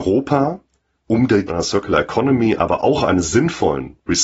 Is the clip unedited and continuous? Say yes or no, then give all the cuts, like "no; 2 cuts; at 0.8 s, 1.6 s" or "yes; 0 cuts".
no; 1 cut; at 1.5 s